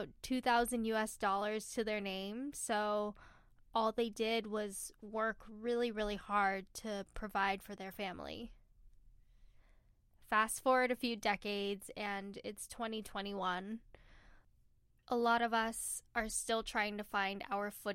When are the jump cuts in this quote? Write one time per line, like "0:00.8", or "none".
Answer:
none